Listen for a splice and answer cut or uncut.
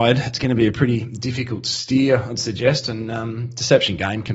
uncut